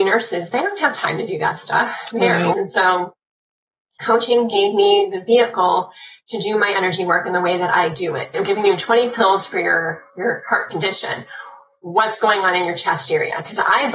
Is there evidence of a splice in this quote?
yes; 3 cuts; at 2.5 s, 8.3 s, 10.1 s

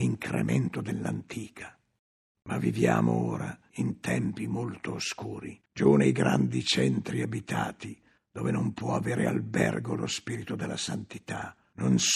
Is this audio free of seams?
no; 1 cut; at 5.6 s

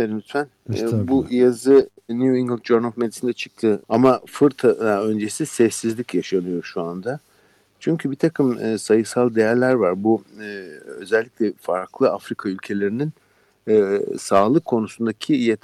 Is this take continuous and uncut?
no; 1 cut; at 3.8 s

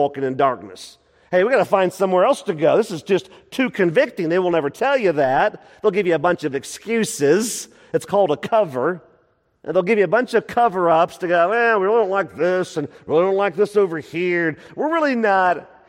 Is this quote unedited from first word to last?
yes; 0 cuts

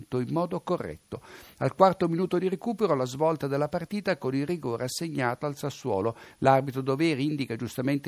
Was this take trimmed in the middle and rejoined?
yes; 1 cut; at 6.3 s

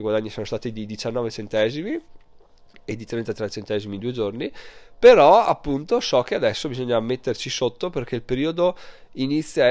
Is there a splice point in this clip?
no; 0 cuts

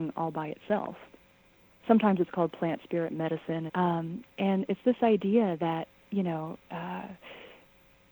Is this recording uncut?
no; 2 cuts; at 1.8 s, 3.7 s

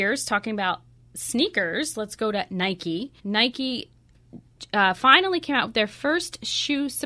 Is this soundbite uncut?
no; 1 cut; at 3.2 s

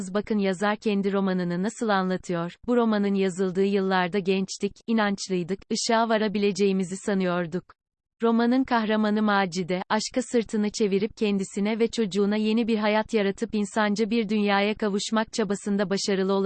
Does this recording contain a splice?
yes; 1 cut; at 8.2 s

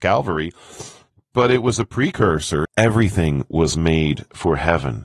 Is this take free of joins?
no; 1 cut; at 2.6 s

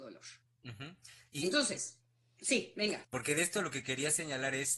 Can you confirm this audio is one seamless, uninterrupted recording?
no; 1 cut; at 3.0 s

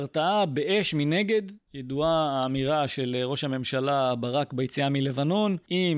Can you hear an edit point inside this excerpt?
no; 0 cuts

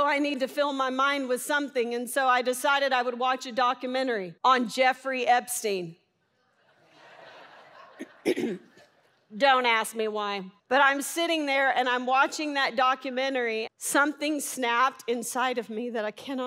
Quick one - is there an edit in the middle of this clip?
yes; 3 cuts; at 4.4 s, 10.6 s, 13.7 s

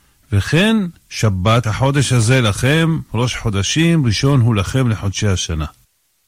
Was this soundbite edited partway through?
yes; 1 cut; at 1.6 s

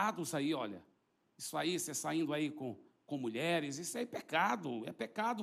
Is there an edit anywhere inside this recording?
no; 0 cuts

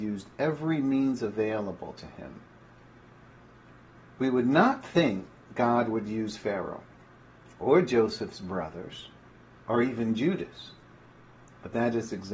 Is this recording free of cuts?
yes; 0 cuts

